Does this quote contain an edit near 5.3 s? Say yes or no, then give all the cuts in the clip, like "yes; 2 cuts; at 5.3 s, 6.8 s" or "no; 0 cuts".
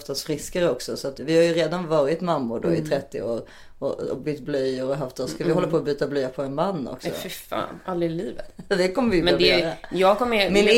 no; 0 cuts